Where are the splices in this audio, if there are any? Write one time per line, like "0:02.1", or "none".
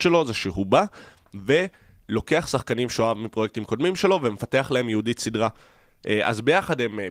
none